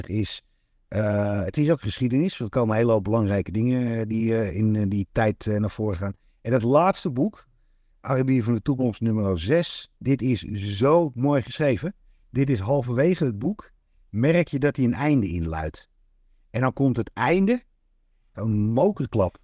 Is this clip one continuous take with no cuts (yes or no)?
no